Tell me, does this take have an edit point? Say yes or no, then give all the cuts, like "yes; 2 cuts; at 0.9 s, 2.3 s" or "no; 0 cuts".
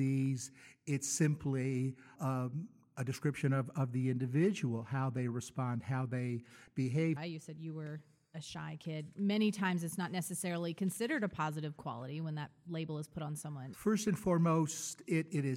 yes; 3 cuts; at 2.2 s, 7.2 s, 13.7 s